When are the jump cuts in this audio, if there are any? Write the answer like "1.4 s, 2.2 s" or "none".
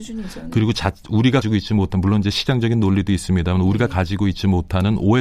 1.4 s